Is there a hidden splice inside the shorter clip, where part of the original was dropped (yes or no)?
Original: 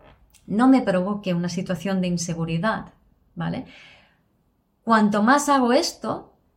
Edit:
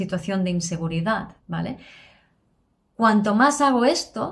yes